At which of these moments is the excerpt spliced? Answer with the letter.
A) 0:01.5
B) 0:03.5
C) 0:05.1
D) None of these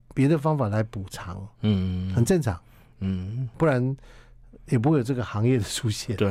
B